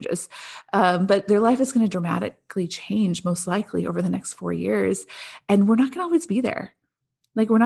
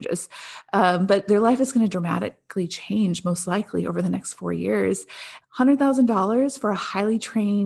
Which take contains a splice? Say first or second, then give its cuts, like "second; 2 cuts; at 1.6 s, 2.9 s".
second; 1 cut; at 5.4 s